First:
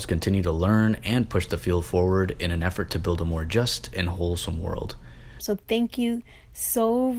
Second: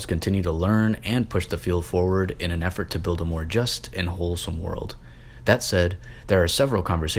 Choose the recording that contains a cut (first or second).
first